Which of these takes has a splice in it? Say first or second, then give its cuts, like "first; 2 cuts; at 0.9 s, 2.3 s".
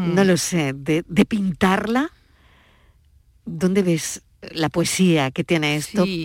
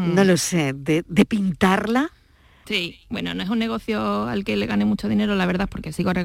second; 1 cut; at 2.6 s